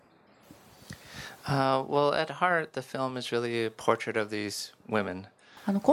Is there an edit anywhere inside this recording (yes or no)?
no